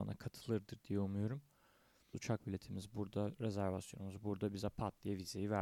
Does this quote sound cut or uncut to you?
cut